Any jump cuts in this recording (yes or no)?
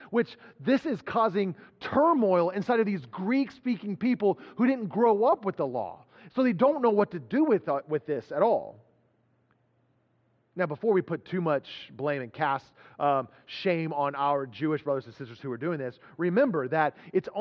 no